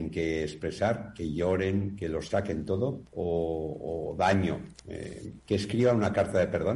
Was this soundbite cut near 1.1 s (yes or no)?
no